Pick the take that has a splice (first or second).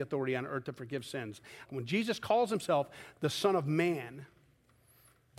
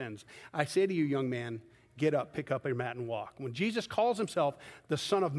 first